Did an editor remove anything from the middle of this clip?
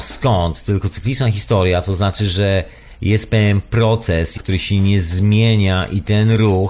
yes; 1 cut; at 4.3 s

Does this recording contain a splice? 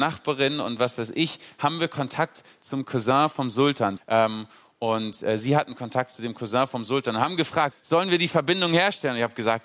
yes; 2 cuts; at 4.0 s, 7.7 s

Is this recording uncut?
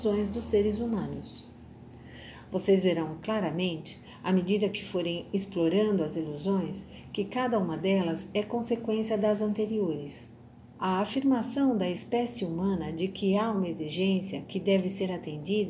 no; 1 cut; at 10.7 s

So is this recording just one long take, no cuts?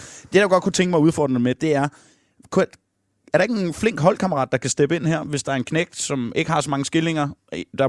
yes; 0 cuts

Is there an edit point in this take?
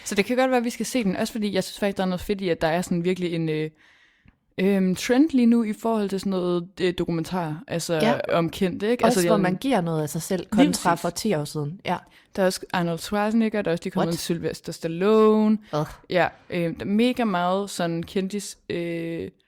yes; 2 cuts; at 8.3 s, 9.3 s

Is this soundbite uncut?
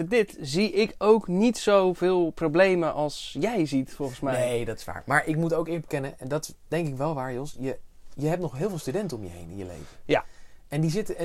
yes; 0 cuts

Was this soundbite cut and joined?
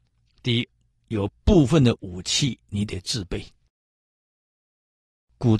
no; 0 cuts

